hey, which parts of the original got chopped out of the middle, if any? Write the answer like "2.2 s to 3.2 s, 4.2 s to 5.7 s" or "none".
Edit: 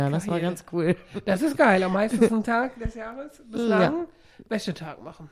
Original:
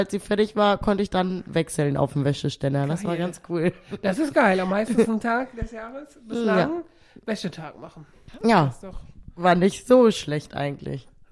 none